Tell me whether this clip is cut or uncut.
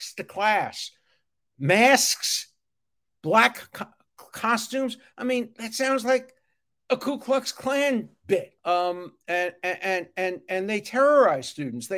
cut